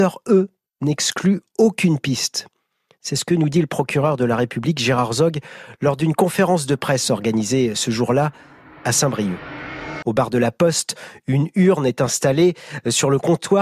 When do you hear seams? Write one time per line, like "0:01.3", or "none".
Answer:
0:10.0